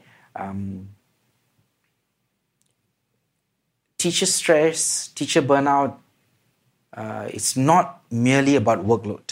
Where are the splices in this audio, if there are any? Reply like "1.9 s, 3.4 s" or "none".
none